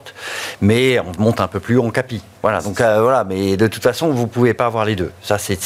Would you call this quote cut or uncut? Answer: uncut